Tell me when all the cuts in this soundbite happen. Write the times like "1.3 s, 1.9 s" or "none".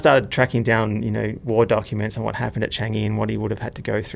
none